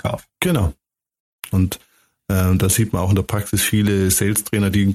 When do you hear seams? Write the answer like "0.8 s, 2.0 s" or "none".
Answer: 1.5 s